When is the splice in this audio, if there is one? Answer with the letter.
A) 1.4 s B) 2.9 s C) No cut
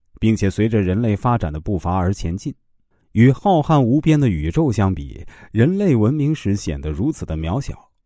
B